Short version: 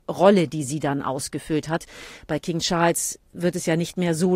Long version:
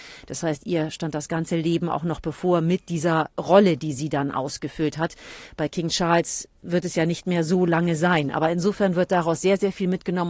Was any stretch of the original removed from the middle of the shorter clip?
no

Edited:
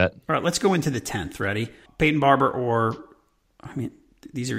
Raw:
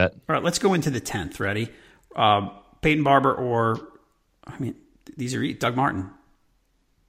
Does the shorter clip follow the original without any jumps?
no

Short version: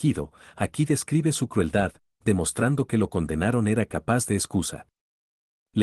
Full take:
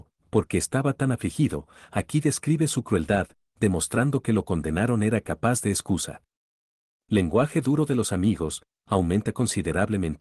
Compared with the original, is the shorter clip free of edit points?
yes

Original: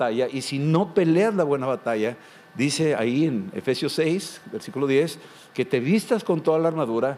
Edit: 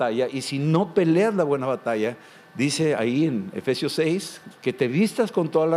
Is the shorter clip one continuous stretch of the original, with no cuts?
no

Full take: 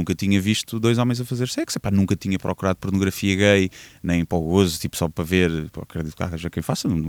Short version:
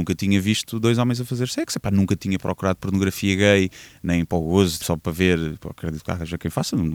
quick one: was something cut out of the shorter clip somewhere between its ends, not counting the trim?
yes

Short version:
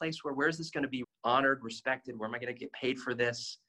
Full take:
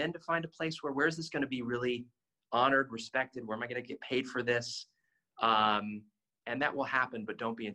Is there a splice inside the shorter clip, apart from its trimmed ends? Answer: yes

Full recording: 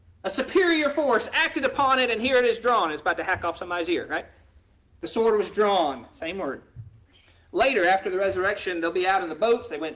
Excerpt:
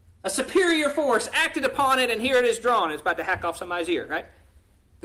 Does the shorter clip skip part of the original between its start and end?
no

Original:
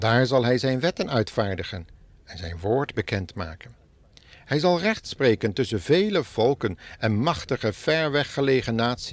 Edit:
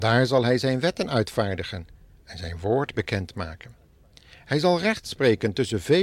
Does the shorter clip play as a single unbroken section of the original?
yes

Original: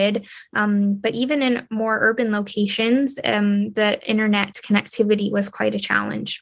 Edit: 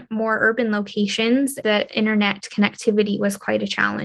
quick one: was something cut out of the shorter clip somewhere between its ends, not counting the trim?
yes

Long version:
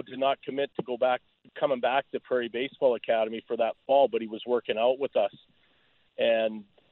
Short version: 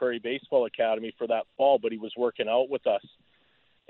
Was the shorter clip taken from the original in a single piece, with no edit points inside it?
yes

